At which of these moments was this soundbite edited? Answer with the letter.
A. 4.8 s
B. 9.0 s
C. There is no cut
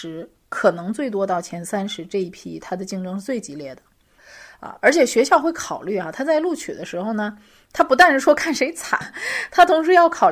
B